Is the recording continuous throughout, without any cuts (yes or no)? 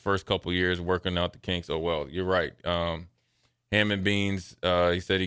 yes